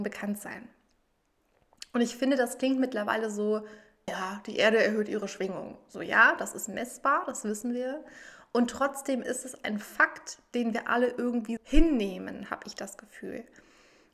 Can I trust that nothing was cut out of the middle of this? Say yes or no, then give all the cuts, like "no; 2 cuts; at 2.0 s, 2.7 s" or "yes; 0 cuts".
no; 2 cuts; at 4.1 s, 11.6 s